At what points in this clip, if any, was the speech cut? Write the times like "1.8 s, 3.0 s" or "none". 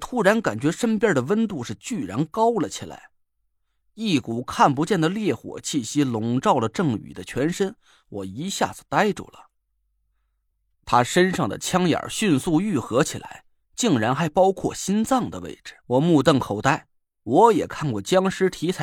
15.8 s